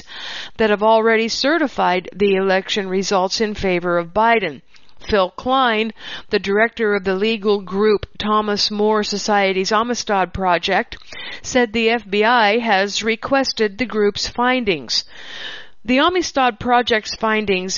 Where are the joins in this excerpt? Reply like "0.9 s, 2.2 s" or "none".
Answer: none